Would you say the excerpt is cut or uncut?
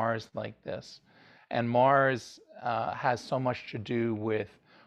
uncut